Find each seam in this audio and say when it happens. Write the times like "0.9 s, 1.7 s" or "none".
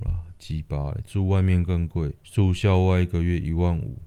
2.2 s